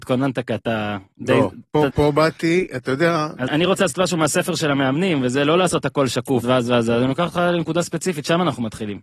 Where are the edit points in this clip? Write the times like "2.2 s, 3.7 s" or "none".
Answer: 1.9 s, 3.5 s, 6.4 s